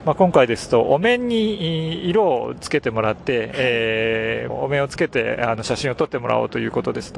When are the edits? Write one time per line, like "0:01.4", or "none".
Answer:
none